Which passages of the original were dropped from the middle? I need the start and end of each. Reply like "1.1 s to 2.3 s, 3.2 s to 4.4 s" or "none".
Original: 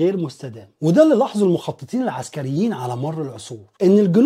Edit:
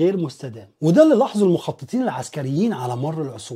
none